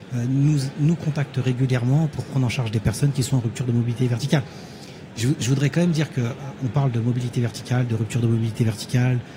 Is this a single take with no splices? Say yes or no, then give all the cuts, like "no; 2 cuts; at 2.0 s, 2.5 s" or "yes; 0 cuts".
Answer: yes; 0 cuts